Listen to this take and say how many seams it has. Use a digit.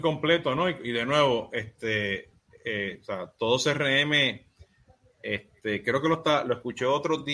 0